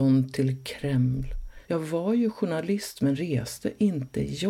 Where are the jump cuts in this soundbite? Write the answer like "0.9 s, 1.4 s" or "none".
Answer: 1.6 s